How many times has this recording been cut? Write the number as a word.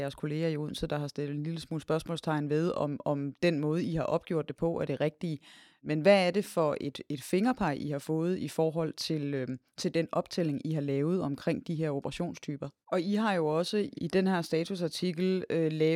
two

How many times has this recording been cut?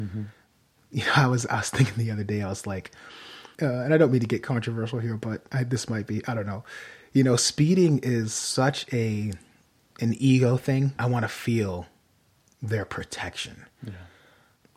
two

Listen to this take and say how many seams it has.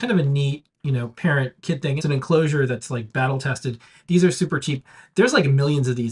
one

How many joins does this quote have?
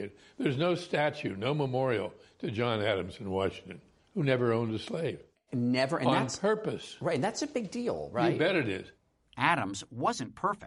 one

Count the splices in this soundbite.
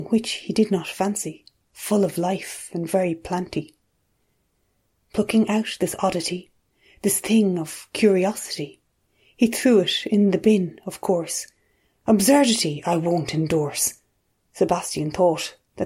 one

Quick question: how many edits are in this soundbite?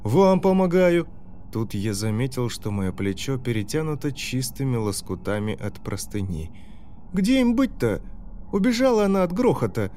three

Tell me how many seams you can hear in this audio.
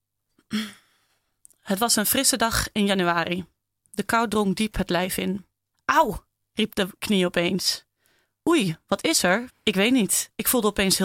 two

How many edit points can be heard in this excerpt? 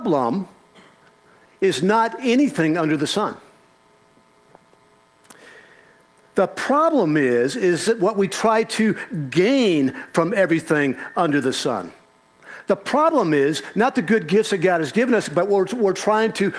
zero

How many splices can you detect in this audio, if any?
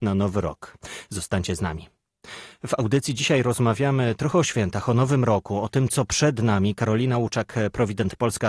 zero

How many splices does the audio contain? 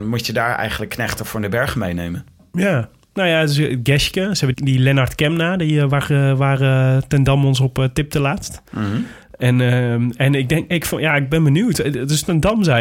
one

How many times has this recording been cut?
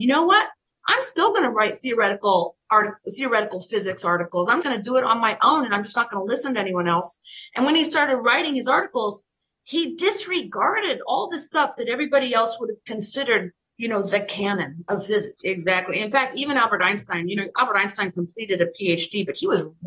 two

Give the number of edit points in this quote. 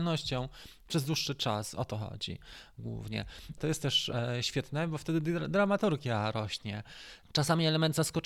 two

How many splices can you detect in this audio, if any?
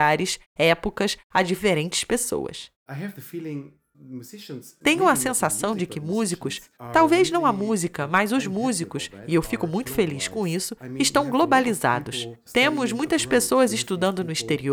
zero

